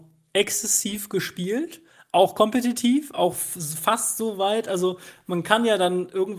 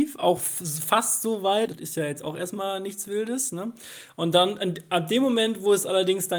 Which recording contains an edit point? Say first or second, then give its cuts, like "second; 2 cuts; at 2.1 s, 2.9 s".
second; 1 cut; at 1.7 s